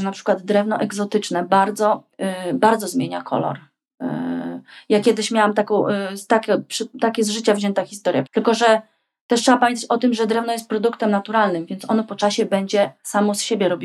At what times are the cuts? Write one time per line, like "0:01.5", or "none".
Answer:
0:02.1
0:08.3